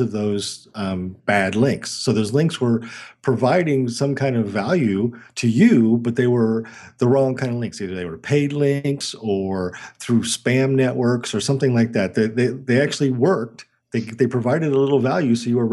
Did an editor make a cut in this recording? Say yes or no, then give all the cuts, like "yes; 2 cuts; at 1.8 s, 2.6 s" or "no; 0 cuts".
yes; 1 cut; at 1.2 s